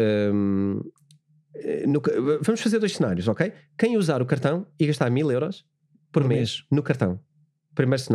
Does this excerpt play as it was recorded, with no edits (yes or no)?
yes